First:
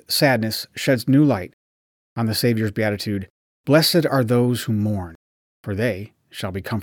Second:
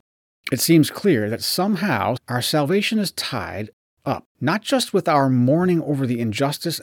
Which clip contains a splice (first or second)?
second